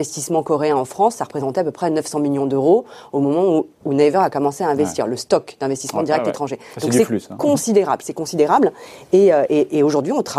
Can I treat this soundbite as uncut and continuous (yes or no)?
yes